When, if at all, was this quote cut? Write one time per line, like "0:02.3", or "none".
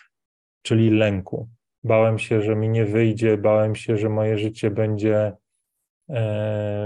0:01.7